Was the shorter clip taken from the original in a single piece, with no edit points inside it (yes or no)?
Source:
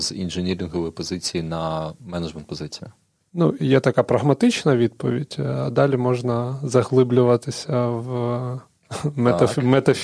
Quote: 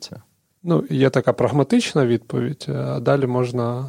yes